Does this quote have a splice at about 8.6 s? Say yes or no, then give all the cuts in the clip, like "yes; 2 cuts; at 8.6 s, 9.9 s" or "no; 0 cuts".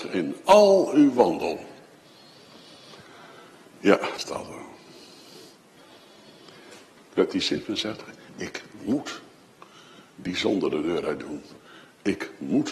no; 2 cuts; at 4.2 s, 7.0 s